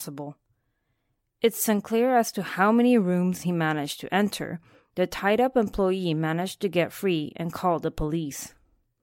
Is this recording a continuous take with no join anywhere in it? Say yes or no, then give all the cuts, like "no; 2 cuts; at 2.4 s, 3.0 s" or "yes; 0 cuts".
no; 1 cut; at 4.8 s